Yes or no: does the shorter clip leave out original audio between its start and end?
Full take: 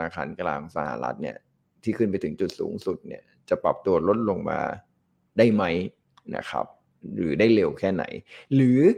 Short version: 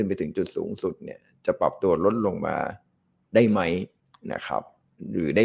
no